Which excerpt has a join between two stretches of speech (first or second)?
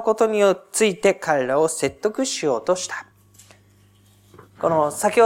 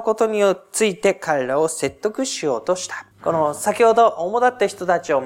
second